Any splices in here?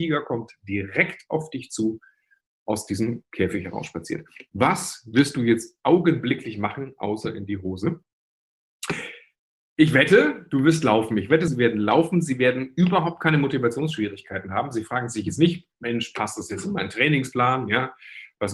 yes; 1 cut; at 11.5 s

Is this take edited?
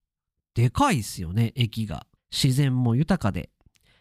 yes; 1 cut; at 2.2 s

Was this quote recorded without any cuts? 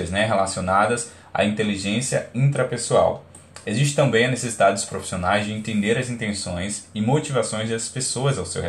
yes; 0 cuts

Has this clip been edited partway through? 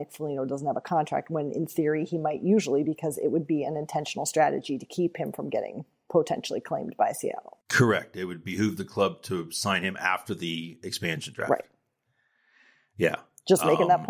yes; 1 cut; at 7.6 s

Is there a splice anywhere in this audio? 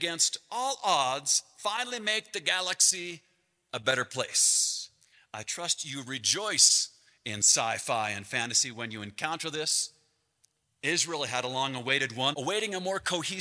yes; 2 cuts; at 10.6 s, 12.3 s

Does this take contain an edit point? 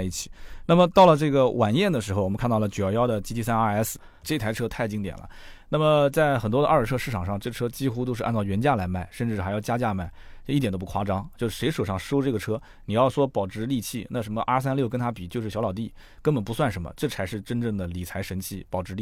yes; 1 cut; at 4.2 s

